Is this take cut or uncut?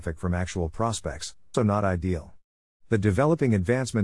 cut